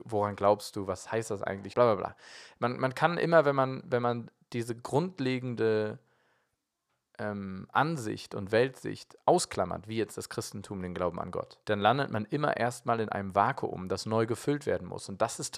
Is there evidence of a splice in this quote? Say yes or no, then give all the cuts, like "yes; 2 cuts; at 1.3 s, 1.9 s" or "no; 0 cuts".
yes; 2 cuts; at 1.7 s, 11.6 s